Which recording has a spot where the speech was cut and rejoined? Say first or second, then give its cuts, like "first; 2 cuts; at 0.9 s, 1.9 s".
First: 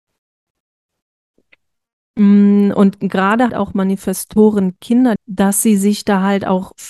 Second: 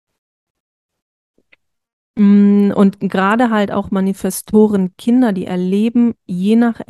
first; 2 cuts; at 3.5 s, 5.2 s